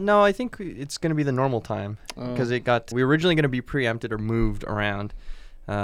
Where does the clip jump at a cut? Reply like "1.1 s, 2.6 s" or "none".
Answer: 2.9 s